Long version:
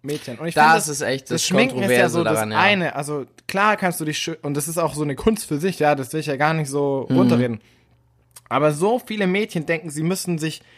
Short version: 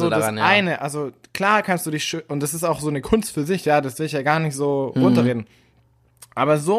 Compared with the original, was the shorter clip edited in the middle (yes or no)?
no